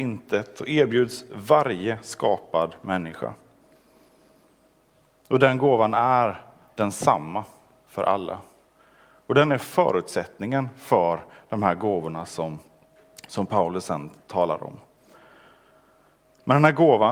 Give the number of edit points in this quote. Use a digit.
0